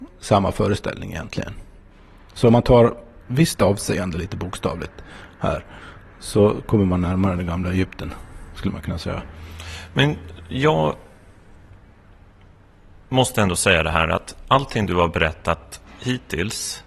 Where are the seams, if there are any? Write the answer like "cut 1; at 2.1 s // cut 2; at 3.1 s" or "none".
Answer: cut 1; at 3.2 s